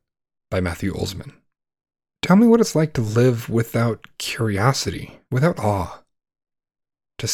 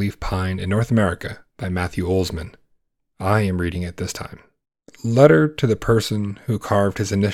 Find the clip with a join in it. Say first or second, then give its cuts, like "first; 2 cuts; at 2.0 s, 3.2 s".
first; 1 cut; at 5.3 s